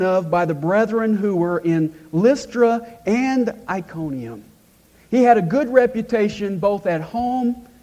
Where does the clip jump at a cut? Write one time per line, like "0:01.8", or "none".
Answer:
none